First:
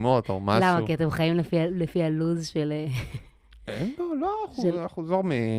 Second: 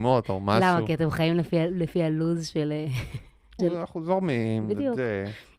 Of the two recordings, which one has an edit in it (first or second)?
second